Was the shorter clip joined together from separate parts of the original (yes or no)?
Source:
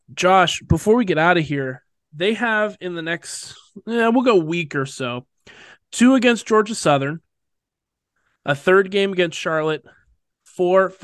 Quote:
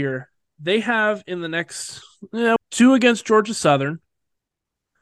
yes